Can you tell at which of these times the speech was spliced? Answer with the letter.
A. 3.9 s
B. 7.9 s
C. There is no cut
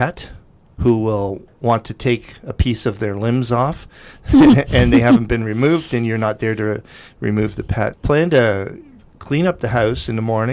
B